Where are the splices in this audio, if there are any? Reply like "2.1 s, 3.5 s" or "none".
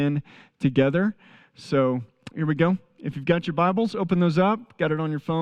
2.3 s